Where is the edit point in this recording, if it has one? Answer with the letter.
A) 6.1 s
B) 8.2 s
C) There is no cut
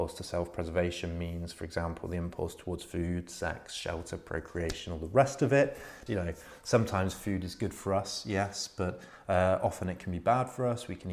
A